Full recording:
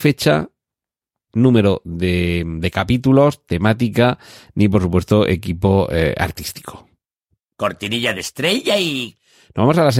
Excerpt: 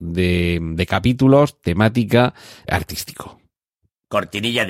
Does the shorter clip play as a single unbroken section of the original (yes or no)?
no